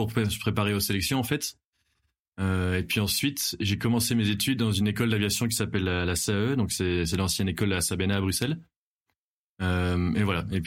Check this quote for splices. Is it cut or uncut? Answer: uncut